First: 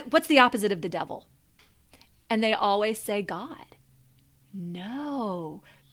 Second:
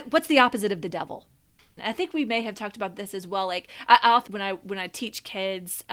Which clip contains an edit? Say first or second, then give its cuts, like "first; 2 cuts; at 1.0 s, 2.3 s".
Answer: second; 2 cuts; at 1.8 s, 4.3 s